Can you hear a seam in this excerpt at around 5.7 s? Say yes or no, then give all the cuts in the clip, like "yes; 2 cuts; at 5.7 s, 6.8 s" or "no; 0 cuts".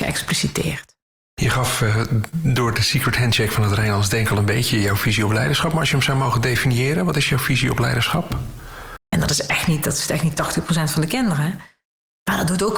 no; 1 cut; at 9.0 s